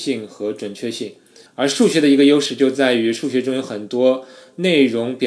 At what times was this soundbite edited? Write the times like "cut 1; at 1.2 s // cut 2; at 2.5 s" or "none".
cut 1; at 1.5 s